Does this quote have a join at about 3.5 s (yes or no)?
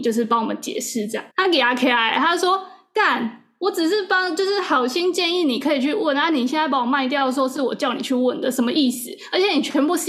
no